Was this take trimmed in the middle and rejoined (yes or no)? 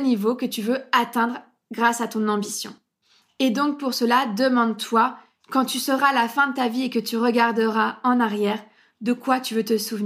no